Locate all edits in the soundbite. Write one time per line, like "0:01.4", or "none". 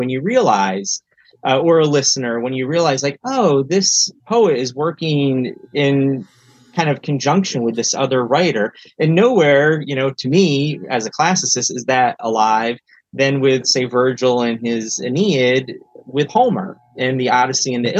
0:04.2